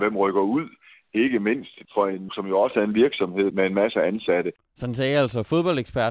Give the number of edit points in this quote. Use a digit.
1